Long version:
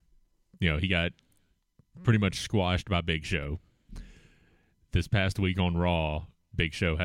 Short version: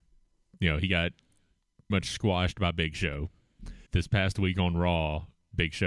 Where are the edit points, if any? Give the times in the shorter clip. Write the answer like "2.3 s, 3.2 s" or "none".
1.9 s, 3.9 s